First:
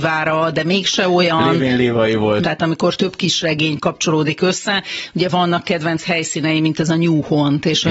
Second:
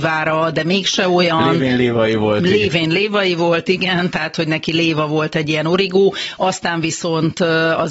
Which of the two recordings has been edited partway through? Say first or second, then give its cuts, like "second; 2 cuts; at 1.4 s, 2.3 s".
first; 1 cut; at 2.4 s